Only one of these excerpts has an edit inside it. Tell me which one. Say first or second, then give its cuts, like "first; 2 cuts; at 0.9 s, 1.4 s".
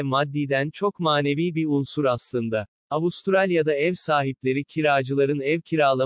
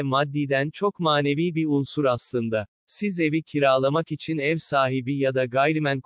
second; 1 cut; at 2.8 s